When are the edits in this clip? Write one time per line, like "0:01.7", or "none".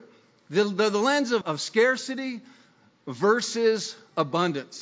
0:01.4